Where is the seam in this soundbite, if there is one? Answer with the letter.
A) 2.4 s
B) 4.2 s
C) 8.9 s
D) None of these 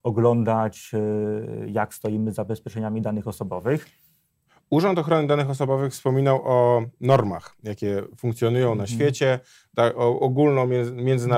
D